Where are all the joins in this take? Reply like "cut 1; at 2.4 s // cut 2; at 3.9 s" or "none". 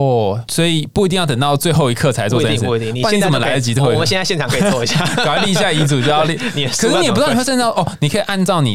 none